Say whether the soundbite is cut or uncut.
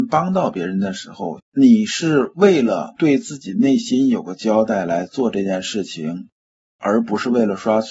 cut